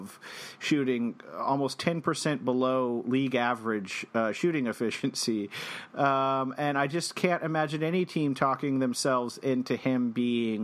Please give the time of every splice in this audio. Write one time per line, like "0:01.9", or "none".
none